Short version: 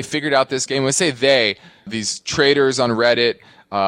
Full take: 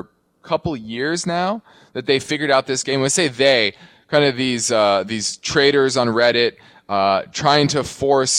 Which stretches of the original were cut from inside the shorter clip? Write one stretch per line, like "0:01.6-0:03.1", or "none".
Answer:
0:04.0-0:05.0